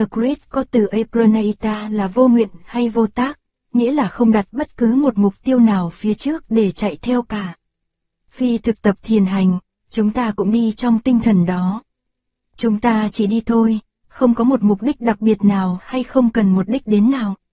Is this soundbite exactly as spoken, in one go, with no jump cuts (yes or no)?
yes